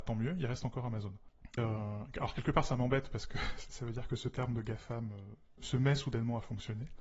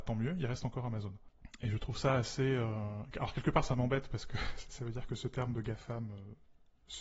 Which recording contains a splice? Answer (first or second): first